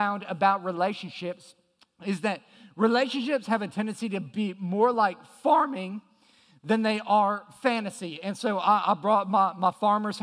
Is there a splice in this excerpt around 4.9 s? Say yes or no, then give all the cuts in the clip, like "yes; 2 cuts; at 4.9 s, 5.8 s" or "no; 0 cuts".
no; 0 cuts